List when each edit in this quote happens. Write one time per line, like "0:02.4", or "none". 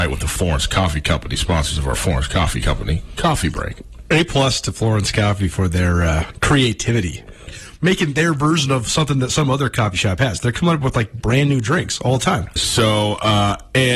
0:07.5
0:12.6